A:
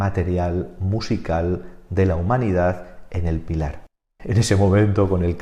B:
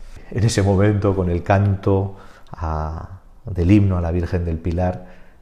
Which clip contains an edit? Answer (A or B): A